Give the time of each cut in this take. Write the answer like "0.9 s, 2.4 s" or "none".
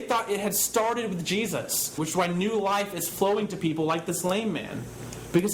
2.0 s